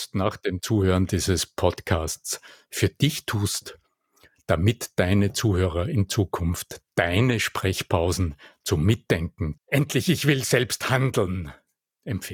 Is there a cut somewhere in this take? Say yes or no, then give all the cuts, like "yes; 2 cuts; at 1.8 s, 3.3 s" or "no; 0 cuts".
yes; 1 cut; at 9.6 s